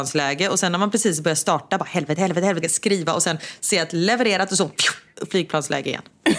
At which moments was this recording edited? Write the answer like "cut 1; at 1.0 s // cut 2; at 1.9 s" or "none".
cut 1; at 2.6 s